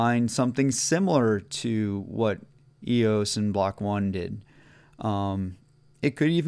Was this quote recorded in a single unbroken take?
yes; 0 cuts

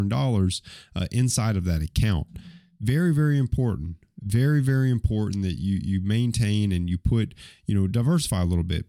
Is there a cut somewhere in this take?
no; 0 cuts

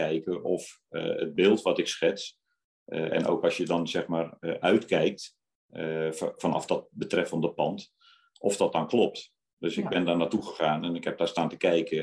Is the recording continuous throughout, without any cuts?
yes; 0 cuts

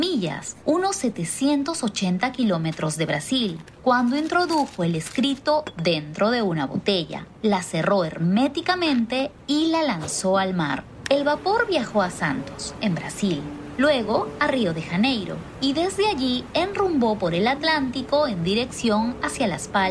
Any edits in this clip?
yes; 2 cuts; at 11.1 s, 12.8 s

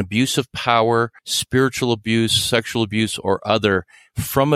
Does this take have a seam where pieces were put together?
yes; 1 cut; at 1.2 s

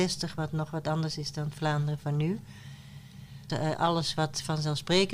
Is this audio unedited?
no; 1 cut; at 3.5 s

